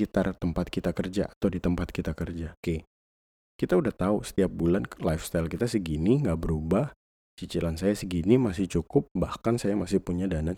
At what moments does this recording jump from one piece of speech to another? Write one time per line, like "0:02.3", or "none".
0:02.6